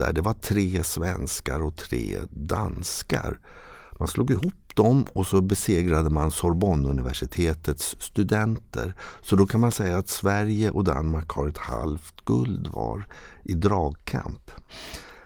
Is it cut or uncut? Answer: uncut